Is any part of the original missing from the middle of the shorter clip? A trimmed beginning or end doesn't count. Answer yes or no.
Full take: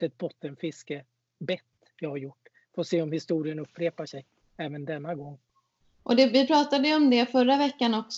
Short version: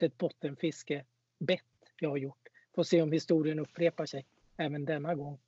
no